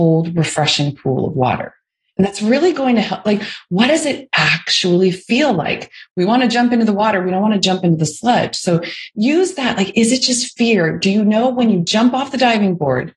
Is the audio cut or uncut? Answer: uncut